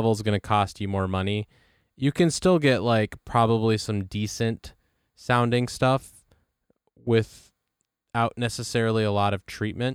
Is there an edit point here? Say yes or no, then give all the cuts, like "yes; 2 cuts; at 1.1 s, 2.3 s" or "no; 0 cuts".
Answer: no; 0 cuts